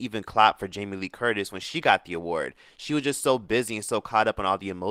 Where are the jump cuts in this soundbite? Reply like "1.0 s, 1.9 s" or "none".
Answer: none